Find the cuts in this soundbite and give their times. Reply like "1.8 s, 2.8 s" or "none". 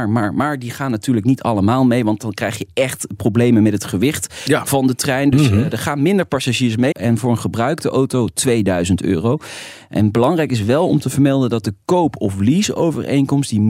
6.9 s